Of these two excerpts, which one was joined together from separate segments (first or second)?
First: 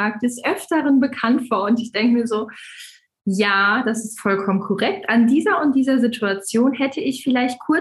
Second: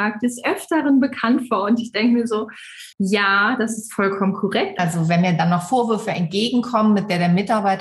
second